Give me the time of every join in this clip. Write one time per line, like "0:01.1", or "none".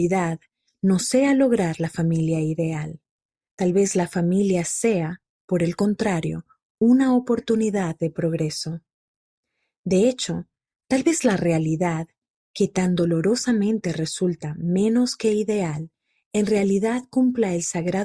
0:03.5